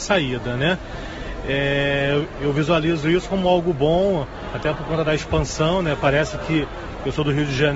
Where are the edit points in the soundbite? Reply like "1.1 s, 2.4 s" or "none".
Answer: none